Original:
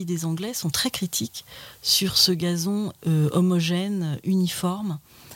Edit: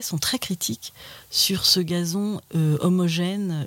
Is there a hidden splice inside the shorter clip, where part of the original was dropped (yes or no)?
no